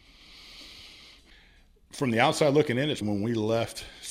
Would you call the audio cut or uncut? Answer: cut